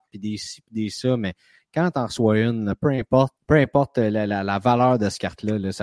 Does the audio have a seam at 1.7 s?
no; 1 cut; at 3.4 s

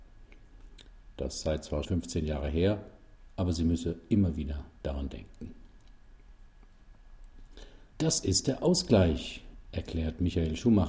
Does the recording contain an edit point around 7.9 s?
yes; 2 cuts; at 1.9 s, 7.9 s

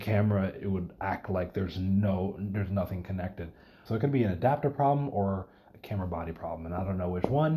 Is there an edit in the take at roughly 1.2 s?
no; 1 cut; at 3.9 s

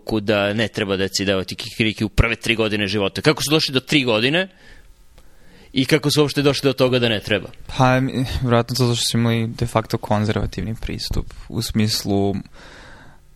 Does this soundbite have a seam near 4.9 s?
no; 0 cuts

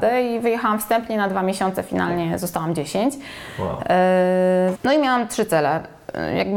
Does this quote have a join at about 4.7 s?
yes; 1 cut; at 4.7 s

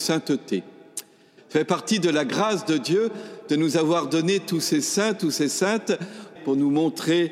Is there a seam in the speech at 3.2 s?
no; 2 cuts; at 1.4 s, 6.4 s

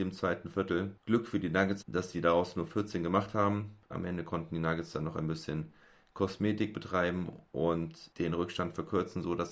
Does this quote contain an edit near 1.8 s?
yes; 2 cuts; at 1.8 s, 3.9 s

